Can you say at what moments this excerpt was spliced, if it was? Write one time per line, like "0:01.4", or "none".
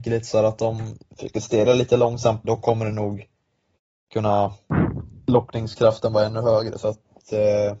0:02.4